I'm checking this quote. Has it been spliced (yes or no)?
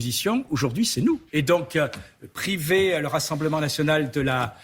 yes